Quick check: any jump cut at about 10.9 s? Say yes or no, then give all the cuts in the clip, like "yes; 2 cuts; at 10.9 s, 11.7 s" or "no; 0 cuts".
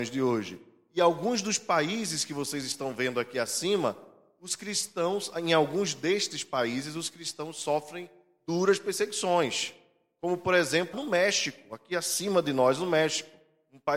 yes; 1 cut; at 10.9 s